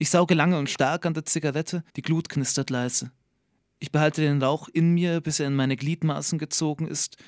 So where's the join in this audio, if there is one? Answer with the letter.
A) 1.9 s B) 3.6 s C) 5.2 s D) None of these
A